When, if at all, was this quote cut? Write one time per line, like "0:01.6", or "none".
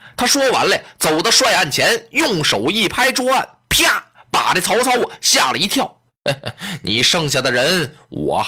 0:06.1